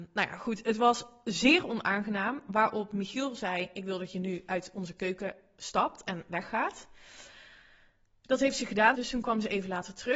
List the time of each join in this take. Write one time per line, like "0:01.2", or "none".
0:08.9